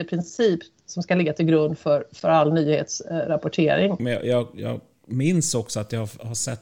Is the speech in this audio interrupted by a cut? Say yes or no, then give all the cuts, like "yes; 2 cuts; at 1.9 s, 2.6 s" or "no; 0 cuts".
yes; 1 cut; at 4.0 s